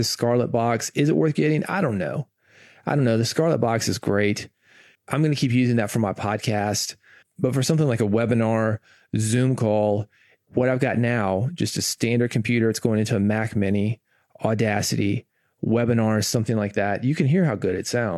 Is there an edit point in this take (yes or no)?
no